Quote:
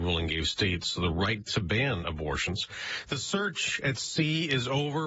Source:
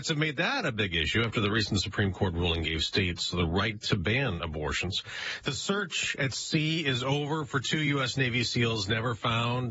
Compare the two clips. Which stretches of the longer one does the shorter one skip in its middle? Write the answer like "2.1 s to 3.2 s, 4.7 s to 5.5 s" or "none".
none